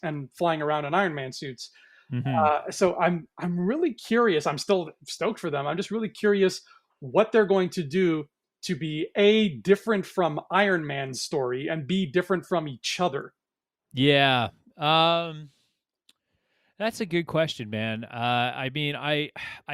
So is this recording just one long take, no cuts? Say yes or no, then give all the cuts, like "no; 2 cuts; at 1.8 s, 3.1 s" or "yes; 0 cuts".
yes; 0 cuts